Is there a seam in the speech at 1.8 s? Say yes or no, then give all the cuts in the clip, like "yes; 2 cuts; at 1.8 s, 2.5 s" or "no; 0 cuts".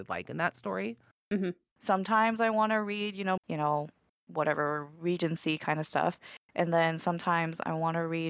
yes; 2 cuts; at 1.8 s, 3.4 s